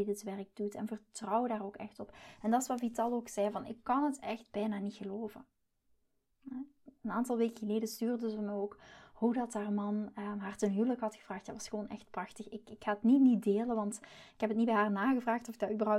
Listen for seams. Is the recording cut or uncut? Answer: uncut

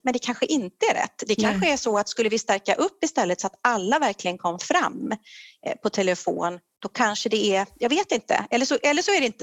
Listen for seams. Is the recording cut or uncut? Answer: uncut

